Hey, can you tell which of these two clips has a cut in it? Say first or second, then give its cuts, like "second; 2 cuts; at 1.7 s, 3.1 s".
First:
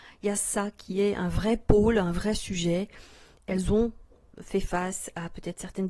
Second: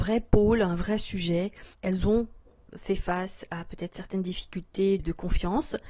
second; 2 cuts; at 1.7 s, 5.0 s